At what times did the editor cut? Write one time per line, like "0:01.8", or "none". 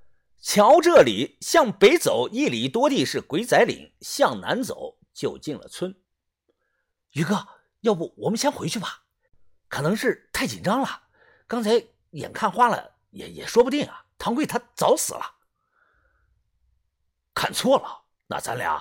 none